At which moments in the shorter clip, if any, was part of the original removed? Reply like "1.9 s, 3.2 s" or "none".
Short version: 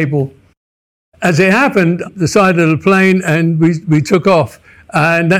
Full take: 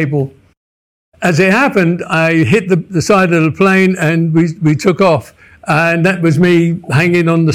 2.1 s